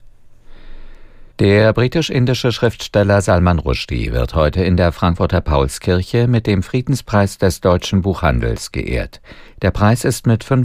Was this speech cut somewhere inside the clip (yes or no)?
yes